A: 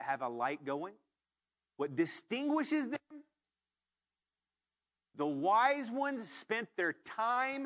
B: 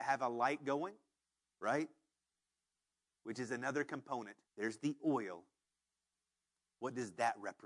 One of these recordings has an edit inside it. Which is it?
B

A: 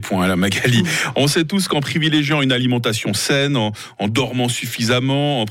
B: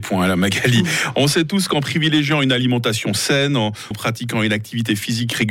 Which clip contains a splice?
B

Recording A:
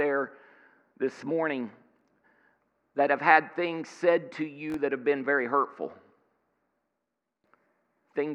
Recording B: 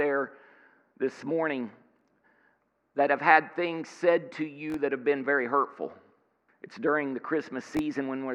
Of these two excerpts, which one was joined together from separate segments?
B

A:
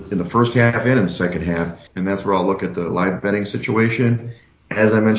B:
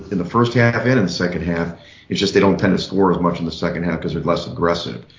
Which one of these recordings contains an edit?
A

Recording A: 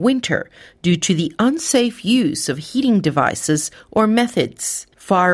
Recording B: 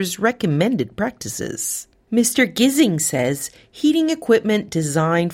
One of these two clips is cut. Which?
B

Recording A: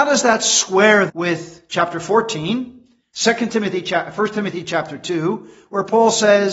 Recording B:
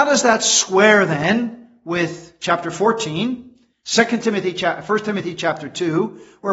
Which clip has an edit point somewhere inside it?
A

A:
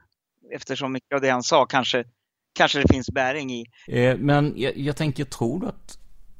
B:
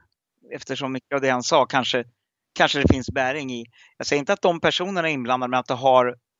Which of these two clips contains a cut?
A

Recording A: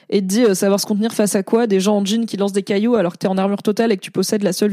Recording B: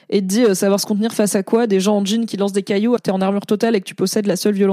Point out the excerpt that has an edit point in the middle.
B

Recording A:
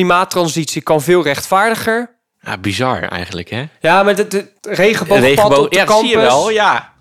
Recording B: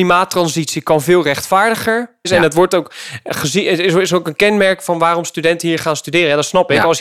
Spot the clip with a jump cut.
B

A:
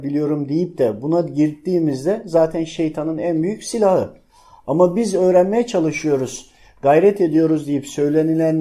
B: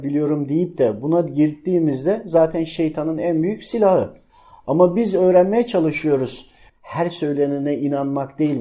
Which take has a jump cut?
B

